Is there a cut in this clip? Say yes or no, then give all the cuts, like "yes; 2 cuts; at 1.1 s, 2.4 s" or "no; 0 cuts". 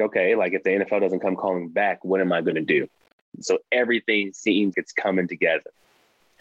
yes; 2 cuts; at 3.4 s, 4.7 s